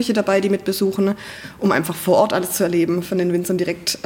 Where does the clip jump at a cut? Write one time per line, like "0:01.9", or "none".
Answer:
none